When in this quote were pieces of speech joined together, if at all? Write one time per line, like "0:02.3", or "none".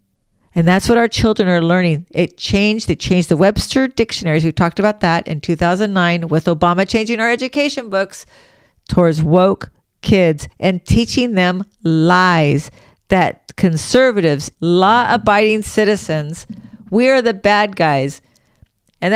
0:14.5